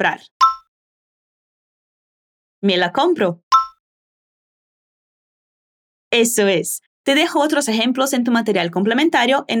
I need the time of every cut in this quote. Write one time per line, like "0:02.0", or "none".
none